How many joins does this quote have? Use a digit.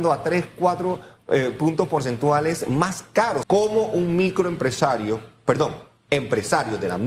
1